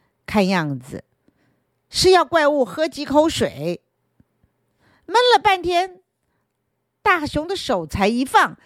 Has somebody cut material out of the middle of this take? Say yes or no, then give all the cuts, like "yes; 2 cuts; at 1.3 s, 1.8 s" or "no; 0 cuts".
no; 0 cuts